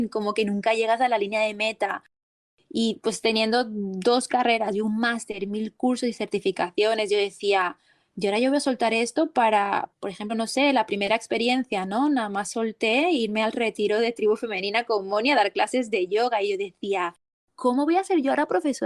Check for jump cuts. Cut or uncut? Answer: uncut